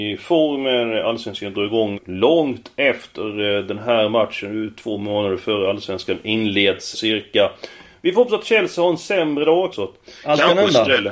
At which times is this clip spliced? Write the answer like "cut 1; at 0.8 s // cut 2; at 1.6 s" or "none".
cut 1; at 1.9 s // cut 2; at 6.9 s // cut 3; at 9.7 s